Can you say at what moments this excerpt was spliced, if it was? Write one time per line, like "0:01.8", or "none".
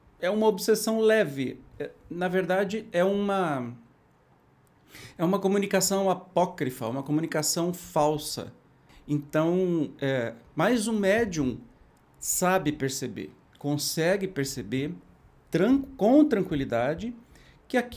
0:08.9